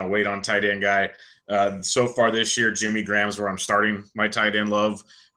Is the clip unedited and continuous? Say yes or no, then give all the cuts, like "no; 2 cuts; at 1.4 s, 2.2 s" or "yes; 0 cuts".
yes; 0 cuts